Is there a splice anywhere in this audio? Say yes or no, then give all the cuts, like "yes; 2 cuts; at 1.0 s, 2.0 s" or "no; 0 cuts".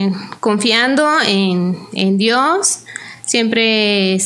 no; 0 cuts